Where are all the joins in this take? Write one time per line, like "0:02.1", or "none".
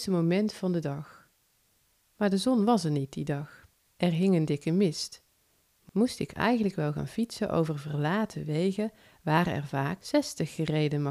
none